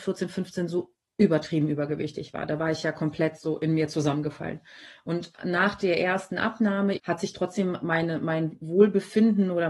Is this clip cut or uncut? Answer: cut